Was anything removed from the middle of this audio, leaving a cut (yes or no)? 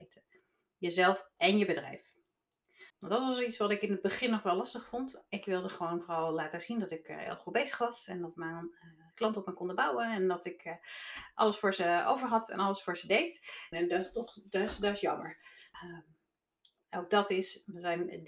yes